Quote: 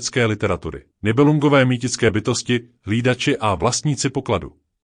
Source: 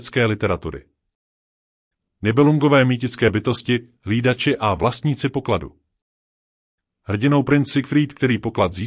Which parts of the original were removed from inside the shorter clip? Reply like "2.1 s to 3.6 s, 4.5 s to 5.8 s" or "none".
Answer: 0.9 s to 2.1 s